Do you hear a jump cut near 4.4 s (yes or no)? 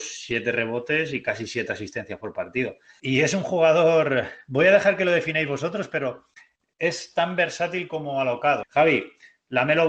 no